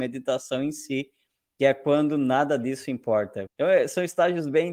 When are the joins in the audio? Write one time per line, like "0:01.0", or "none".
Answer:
0:03.5

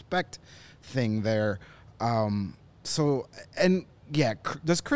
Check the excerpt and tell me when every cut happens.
none

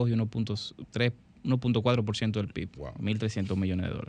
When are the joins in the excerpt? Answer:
0:02.7

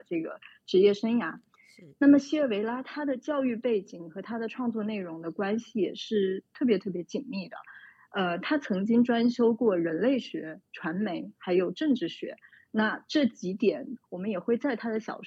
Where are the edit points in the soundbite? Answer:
0:14.0

